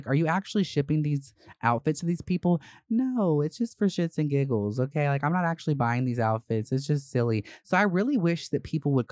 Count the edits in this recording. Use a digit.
0